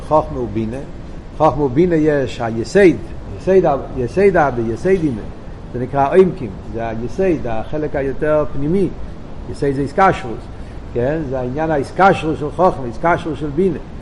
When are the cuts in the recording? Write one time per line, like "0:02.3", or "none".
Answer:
none

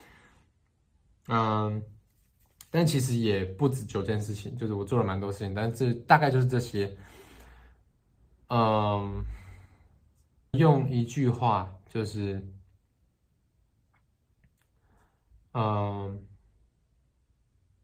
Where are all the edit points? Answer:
0:10.5

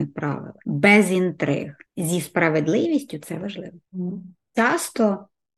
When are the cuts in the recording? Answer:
0:04.5

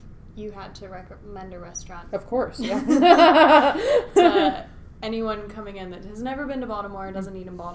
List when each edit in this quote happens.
0:02.1

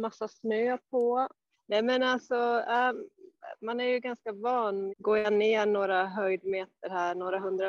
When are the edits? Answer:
0:01.5
0:04.9

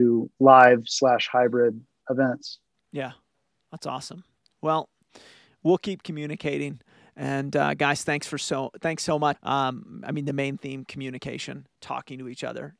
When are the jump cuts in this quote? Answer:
0:09.3

